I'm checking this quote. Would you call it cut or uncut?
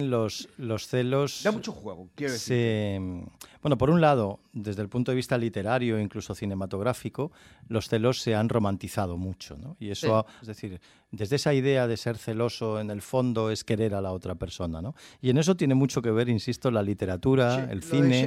cut